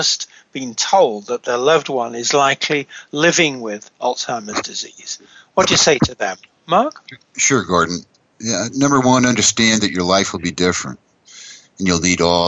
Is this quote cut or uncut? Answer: uncut